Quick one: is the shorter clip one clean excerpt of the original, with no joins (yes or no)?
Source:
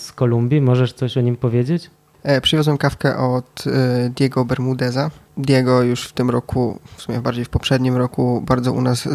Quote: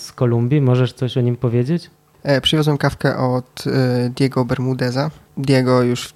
yes